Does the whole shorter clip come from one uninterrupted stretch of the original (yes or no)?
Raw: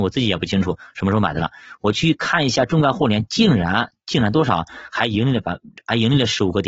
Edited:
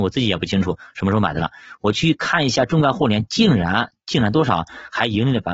yes